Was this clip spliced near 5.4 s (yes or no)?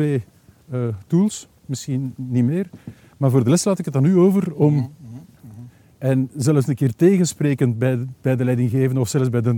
yes